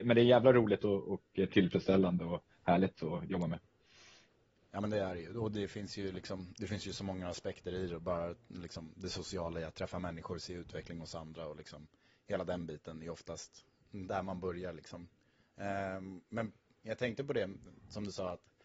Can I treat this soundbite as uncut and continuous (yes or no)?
no